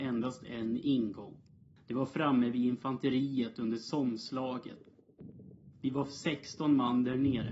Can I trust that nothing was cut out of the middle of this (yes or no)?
yes